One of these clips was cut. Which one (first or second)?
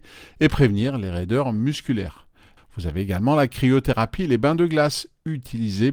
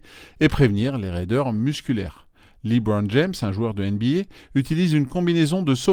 first